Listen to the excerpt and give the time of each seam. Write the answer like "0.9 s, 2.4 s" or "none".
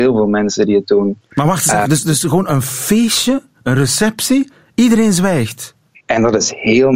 5.9 s